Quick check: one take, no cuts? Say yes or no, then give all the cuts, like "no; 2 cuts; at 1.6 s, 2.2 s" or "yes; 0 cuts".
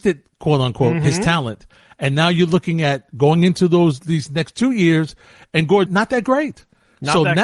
no; 1 cut; at 5.9 s